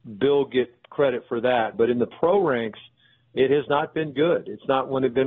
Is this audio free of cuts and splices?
no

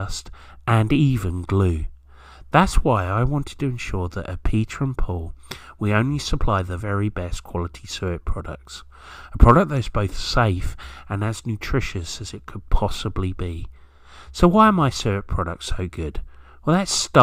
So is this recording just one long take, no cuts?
no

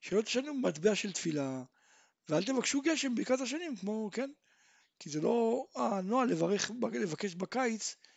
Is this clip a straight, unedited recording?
yes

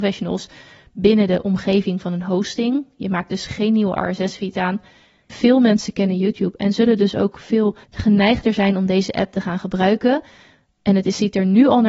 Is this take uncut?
no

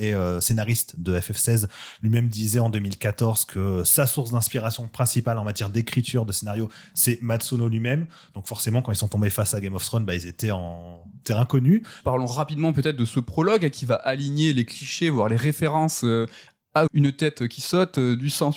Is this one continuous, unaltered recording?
no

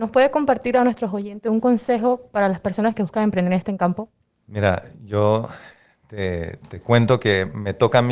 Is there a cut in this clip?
no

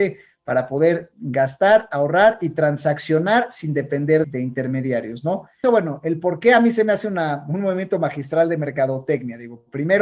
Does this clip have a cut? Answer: yes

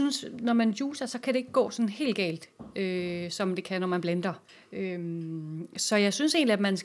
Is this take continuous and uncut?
yes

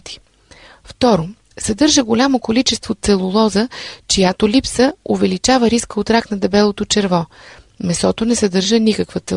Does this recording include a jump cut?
no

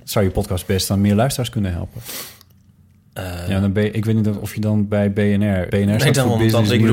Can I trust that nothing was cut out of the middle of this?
no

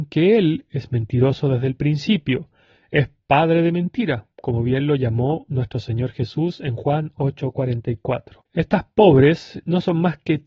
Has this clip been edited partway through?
yes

